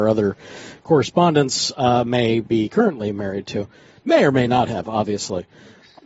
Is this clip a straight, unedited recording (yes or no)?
yes